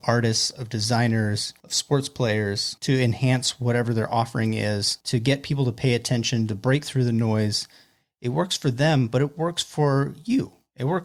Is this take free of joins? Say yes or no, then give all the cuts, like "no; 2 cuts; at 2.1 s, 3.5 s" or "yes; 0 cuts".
yes; 0 cuts